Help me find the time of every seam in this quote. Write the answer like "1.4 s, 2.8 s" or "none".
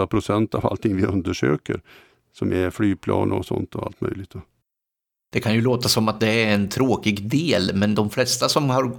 none

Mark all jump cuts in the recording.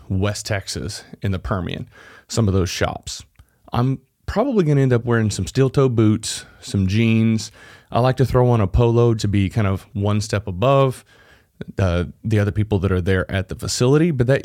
9.2 s

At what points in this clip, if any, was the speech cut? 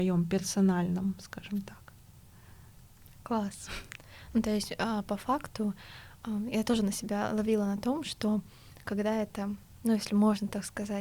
none

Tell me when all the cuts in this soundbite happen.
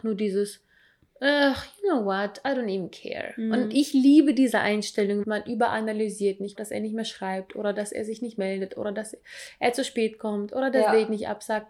5.2 s, 6.5 s

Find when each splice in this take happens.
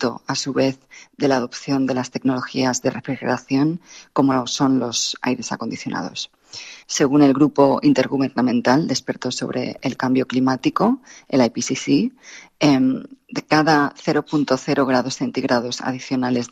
6.8 s

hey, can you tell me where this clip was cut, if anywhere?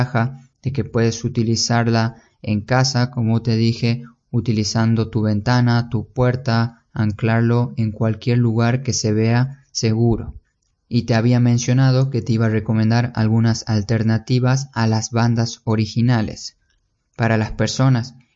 none

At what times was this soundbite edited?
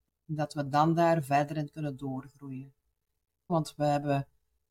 3.5 s

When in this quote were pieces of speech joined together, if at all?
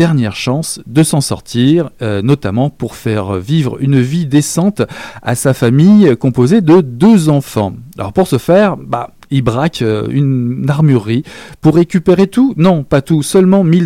none

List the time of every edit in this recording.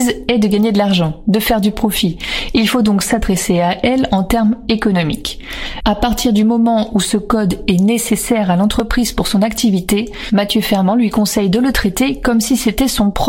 5.8 s

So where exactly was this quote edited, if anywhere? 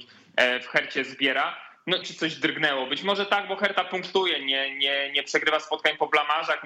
2.0 s

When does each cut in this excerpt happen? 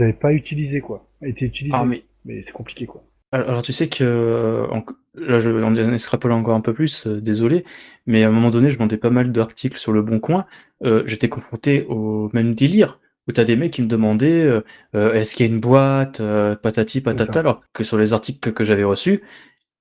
none

